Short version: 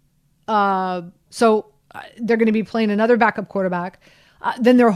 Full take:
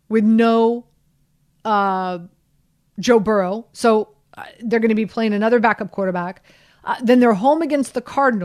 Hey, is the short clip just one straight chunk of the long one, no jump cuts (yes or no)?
no